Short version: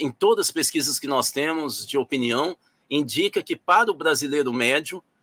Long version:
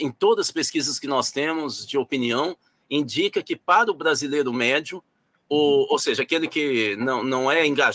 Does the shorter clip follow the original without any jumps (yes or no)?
yes